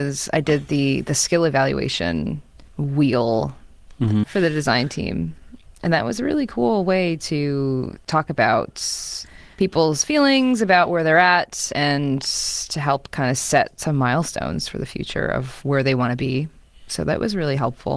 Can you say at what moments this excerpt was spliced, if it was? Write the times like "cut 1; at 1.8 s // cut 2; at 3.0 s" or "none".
cut 1; at 4.2 s

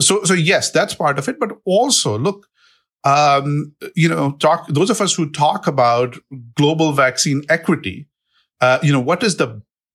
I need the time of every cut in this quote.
none

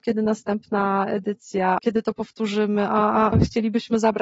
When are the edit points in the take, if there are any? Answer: cut 1; at 1.8 s // cut 2; at 3.3 s

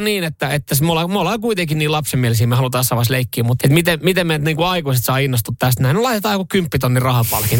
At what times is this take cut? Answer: cut 1; at 3.6 s

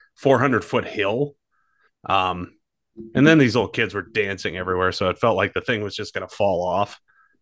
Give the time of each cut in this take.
cut 1; at 1.9 s

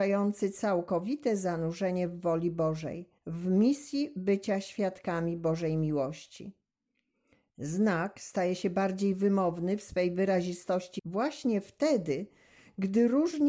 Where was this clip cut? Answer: cut 1; at 3.2 s // cut 2; at 7.5 s

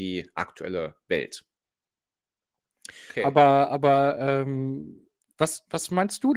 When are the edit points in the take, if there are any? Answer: cut 1; at 3.1 s

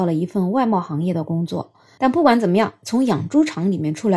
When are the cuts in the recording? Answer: cut 1; at 2.0 s

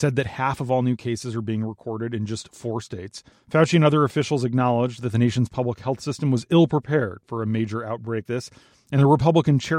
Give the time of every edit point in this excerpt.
cut 1; at 3.3 s // cut 2; at 8.3 s

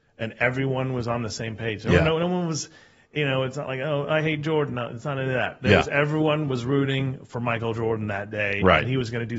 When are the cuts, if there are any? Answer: none

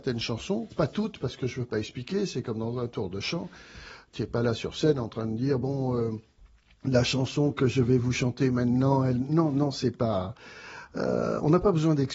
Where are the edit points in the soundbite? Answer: none

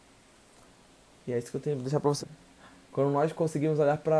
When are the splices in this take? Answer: cut 1; at 2.2 s

